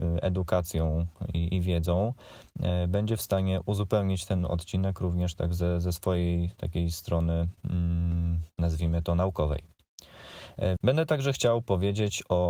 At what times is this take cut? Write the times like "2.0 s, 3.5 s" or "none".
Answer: 10.8 s